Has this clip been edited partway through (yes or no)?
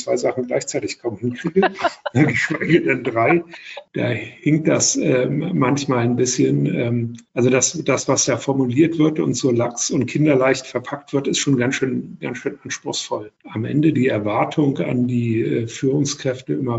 no